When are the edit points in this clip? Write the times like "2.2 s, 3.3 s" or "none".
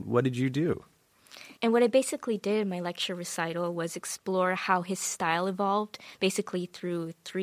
1.6 s